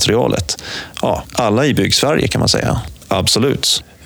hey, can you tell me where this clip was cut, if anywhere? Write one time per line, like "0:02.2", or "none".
0:00.9
0:03.1